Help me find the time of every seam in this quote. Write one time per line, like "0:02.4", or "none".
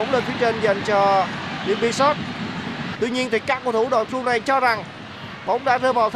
0:02.9

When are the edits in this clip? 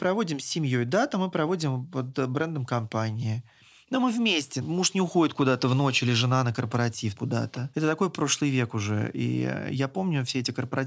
none

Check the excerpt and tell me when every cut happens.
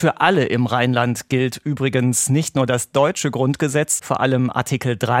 0:04.0

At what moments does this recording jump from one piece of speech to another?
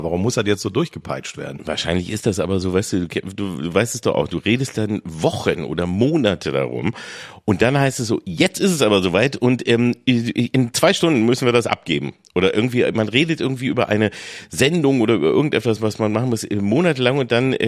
none

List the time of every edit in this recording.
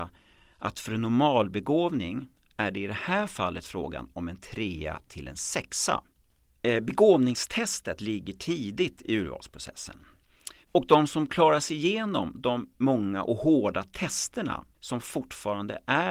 0:10.6
0:14.7

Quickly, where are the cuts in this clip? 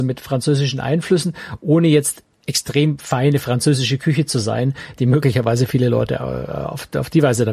0:02.3
0:05.0

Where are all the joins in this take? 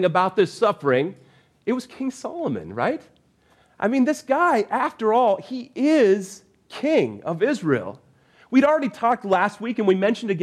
none

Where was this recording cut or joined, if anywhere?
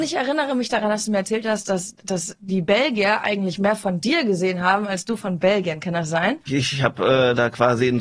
0:06.5

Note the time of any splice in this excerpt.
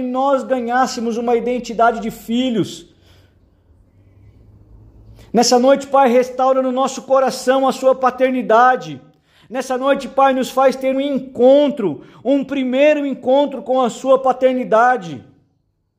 0:10.9

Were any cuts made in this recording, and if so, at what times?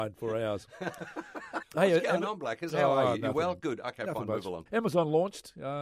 0:01.6
0:04.7

